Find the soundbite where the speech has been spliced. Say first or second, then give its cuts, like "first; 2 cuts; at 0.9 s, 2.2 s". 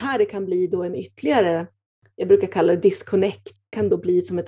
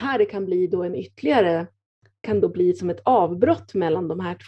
second; 1 cut; at 2.1 s